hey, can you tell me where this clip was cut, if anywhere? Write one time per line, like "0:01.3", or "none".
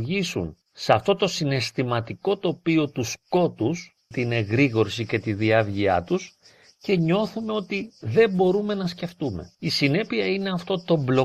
0:04.1
0:09.5